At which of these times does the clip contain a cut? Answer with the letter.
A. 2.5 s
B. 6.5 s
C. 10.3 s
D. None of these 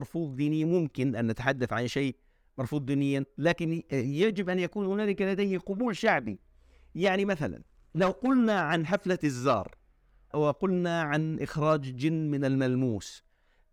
C